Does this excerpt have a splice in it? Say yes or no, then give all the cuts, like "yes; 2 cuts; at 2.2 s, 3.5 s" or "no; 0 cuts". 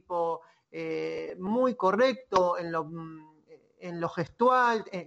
no; 0 cuts